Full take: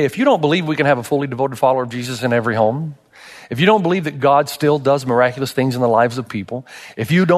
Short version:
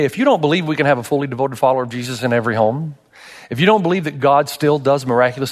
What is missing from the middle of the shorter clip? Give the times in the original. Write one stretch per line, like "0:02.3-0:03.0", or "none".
none